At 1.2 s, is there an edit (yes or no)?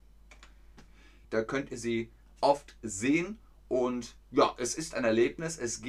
yes